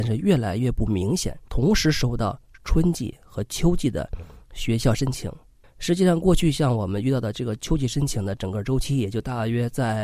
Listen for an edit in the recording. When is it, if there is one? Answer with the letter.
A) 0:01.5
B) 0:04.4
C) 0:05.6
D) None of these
A